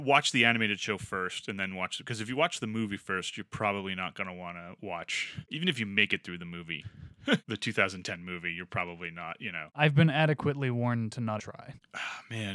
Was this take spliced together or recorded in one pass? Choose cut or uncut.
cut